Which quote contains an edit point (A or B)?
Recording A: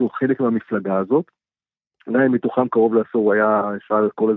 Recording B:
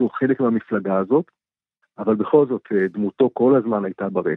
B